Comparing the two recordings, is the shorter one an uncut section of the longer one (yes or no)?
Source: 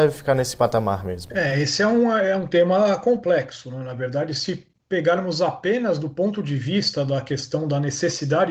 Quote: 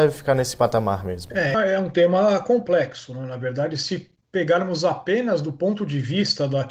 no